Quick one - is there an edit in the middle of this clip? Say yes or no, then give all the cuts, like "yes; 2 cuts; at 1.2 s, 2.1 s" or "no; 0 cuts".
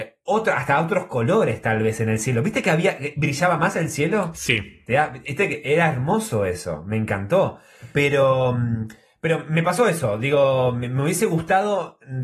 no; 0 cuts